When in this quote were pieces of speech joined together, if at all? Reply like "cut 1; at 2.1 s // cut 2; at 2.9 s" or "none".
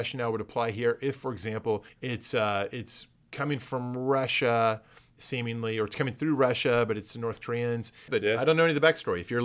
cut 1; at 1.9 s // cut 2; at 8.1 s